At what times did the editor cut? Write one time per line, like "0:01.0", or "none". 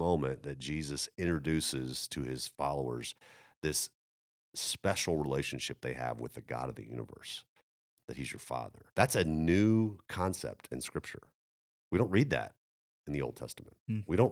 0:08.9